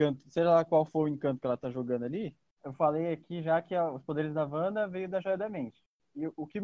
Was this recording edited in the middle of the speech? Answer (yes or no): yes